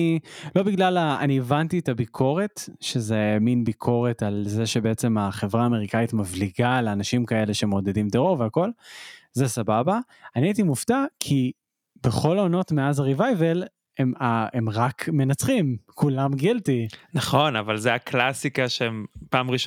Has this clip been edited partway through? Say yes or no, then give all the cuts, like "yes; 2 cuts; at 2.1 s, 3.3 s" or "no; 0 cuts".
no; 0 cuts